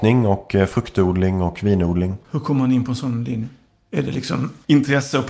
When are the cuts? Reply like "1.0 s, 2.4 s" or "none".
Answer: 2.2 s